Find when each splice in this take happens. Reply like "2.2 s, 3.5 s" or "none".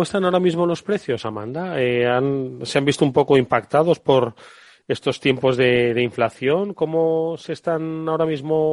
none